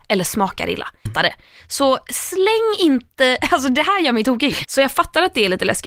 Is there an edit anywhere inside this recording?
yes; 2 cuts; at 1.1 s, 4.6 s

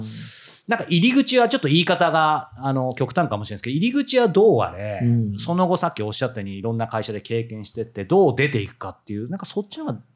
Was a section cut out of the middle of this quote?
no; 0 cuts

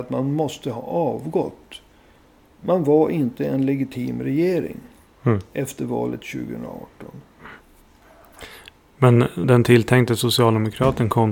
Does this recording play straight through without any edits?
no; 1 cut; at 9.4 s

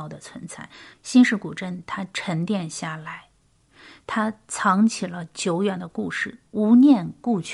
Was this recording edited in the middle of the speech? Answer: yes; 1 cut; at 0.9 s

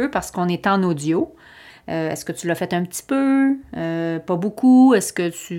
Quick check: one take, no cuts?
no; 1 cut; at 1.7 s

